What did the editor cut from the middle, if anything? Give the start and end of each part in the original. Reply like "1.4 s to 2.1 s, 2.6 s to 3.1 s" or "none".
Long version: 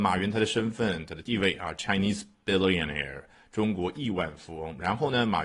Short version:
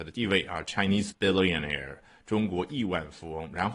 2.2 s to 2.4 s